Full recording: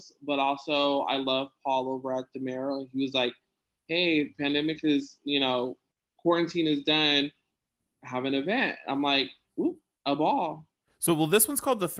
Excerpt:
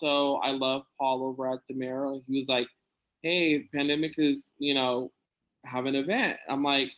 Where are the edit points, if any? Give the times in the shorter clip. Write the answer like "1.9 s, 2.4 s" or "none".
5.4 s

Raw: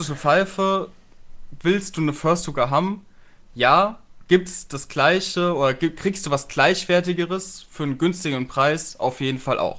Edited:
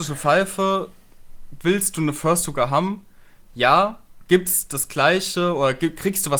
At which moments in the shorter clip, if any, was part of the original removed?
none

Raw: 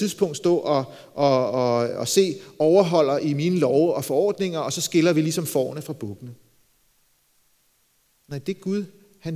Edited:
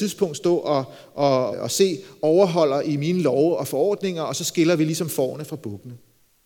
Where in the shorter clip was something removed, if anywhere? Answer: 1.5 s

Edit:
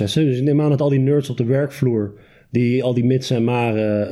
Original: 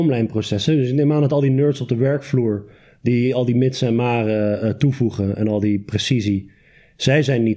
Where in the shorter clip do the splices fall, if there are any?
none

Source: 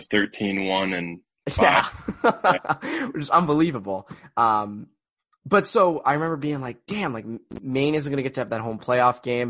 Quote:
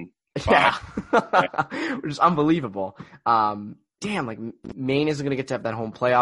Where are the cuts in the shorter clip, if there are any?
4.0 s

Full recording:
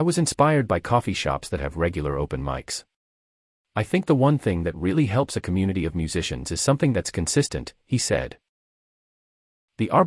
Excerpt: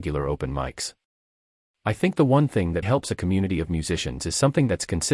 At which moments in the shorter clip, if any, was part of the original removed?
2.8 s

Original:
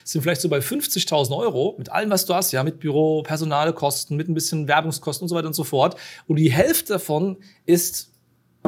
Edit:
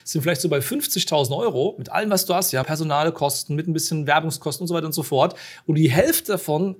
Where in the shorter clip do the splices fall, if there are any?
2.6 s

